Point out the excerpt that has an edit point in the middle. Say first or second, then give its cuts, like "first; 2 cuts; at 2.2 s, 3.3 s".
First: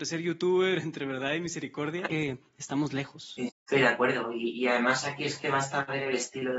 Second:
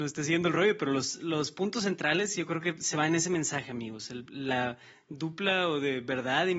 first; 2 cuts; at 2.1 s, 3.5 s